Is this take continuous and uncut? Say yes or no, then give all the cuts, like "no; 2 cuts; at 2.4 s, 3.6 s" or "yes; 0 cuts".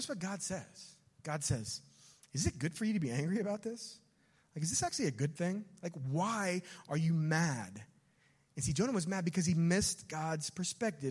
yes; 0 cuts